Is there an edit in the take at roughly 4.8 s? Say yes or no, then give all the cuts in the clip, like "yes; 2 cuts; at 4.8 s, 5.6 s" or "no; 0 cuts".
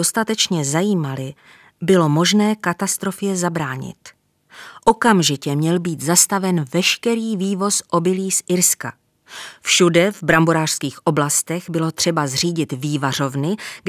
no; 0 cuts